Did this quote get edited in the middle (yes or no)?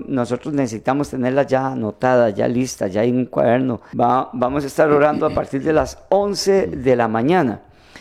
yes